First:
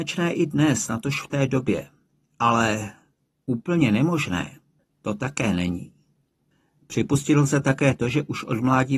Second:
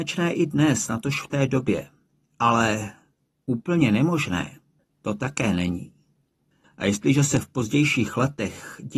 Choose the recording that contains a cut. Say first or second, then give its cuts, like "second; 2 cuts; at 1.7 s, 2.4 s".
second; 1 cut; at 6.6 s